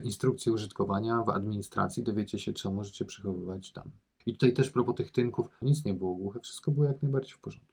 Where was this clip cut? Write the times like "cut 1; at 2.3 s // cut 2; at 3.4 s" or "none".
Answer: cut 1; at 4.2 s // cut 2; at 5.6 s